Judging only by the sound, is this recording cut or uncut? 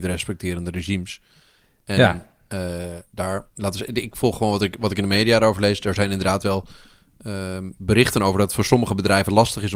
uncut